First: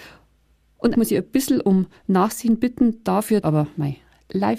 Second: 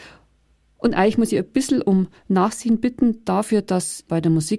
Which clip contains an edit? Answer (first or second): first